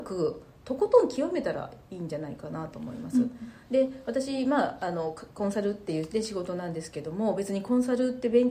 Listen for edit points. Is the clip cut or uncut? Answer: uncut